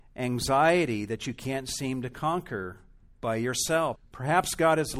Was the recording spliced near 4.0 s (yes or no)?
yes